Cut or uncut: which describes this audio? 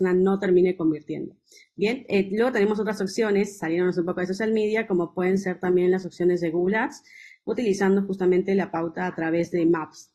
uncut